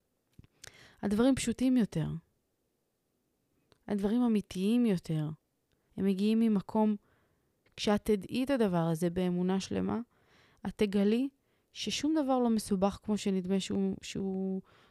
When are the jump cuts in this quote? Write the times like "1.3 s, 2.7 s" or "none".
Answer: 5.9 s, 7.7 s